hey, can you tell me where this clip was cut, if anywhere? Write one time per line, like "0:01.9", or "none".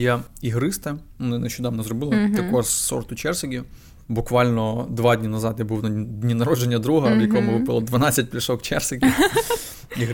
none